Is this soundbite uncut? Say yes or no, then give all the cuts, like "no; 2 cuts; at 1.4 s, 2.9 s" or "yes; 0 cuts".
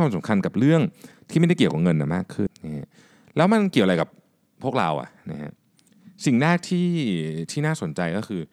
no; 1 cut; at 2.5 s